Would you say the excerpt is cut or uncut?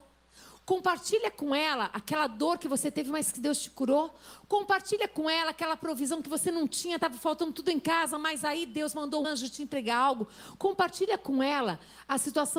cut